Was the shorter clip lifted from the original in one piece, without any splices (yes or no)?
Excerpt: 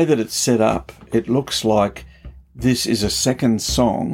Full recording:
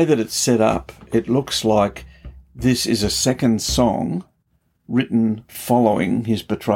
yes